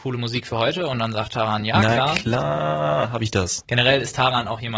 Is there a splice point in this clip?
yes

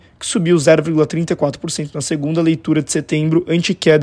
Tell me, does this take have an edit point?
no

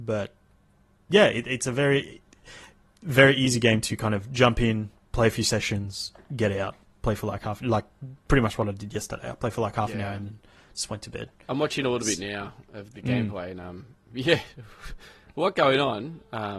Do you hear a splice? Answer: no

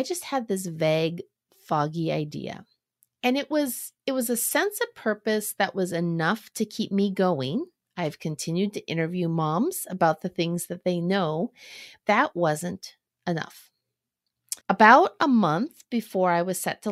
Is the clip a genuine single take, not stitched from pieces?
no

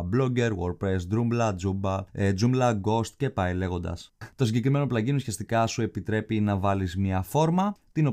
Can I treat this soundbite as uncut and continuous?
no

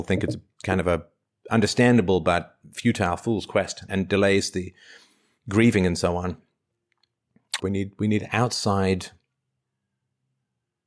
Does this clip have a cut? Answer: yes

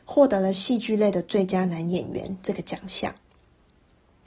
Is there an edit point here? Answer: no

